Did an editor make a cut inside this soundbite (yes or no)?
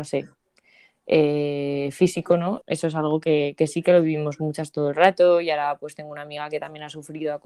yes